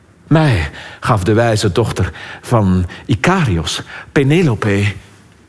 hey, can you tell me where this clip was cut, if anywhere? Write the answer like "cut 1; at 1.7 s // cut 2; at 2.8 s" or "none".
none